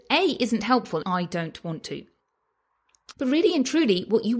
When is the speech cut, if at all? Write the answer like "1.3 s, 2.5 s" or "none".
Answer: 1.0 s, 3.1 s